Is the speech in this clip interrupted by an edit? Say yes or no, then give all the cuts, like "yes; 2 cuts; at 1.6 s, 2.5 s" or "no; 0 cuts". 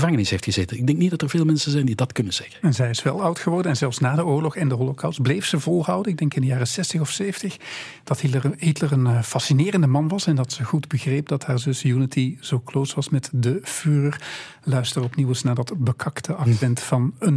no; 0 cuts